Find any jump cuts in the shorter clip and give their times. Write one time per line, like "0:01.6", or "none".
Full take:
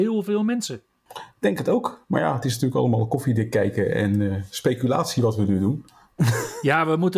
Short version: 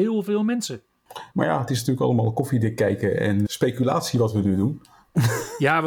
0:01.3
0:03.5